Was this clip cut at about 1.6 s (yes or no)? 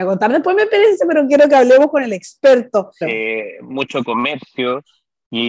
no